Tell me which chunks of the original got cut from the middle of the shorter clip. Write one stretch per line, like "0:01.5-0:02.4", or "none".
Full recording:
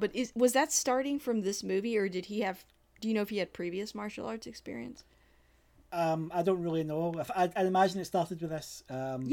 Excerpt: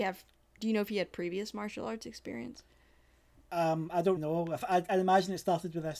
0:06.6-0:06.8